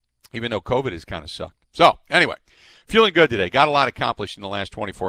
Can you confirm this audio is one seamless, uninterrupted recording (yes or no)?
yes